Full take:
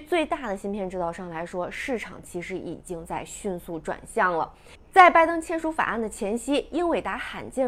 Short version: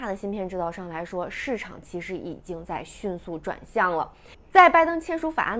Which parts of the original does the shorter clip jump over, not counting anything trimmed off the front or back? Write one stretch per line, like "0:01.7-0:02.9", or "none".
none